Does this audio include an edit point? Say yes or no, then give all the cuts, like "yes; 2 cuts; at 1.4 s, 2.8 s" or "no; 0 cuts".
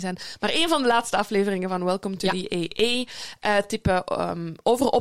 no; 0 cuts